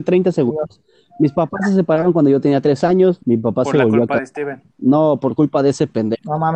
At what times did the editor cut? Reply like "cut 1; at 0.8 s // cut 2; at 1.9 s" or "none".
cut 1; at 4.7 s